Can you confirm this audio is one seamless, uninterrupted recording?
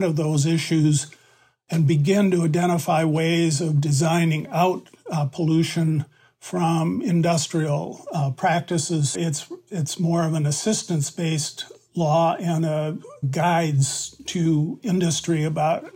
no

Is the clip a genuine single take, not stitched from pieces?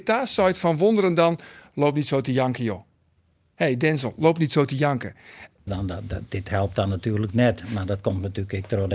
no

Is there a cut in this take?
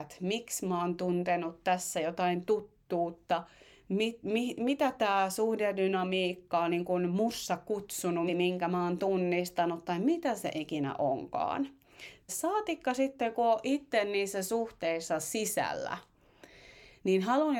yes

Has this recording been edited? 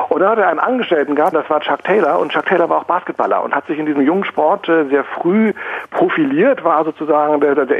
yes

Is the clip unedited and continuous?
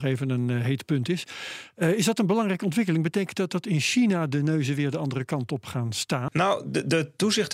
no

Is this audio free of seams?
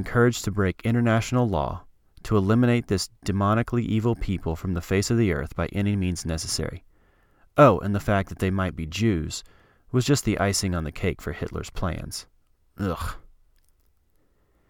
yes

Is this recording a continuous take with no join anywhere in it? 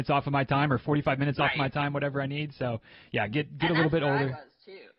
yes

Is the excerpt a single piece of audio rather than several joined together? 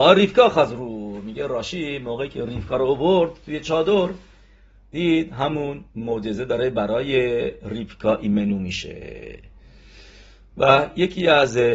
no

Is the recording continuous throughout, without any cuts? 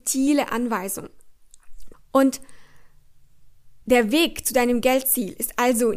no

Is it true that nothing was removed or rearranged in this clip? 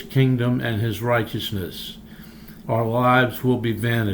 no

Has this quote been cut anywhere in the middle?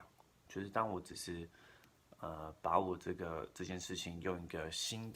no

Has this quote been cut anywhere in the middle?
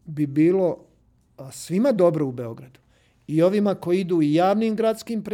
no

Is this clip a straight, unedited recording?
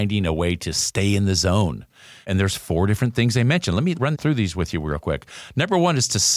yes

